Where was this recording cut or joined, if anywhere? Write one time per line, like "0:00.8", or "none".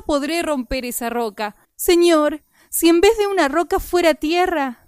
0:01.6